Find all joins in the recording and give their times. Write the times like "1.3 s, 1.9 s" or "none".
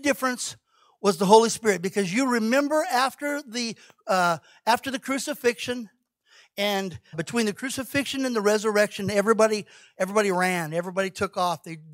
7.1 s